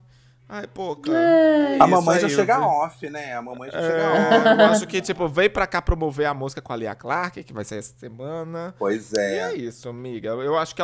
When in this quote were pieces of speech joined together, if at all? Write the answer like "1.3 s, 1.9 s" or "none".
none